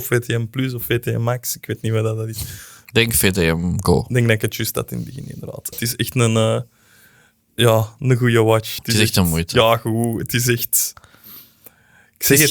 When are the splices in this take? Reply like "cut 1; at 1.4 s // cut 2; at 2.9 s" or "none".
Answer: cut 1; at 5.7 s // cut 2; at 8.8 s